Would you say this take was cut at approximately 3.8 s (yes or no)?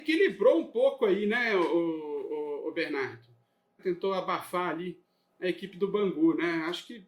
yes